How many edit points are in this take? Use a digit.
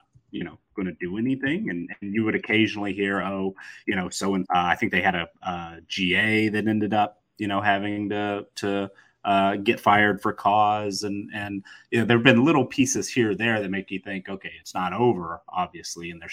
1